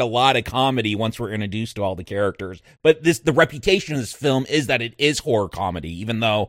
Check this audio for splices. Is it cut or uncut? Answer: uncut